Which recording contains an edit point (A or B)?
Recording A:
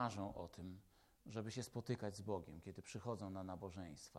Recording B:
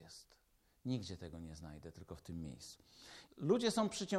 B